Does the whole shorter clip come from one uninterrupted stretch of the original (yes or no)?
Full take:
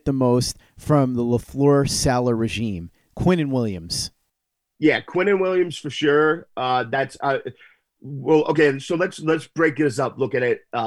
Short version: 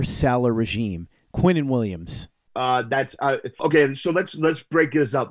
no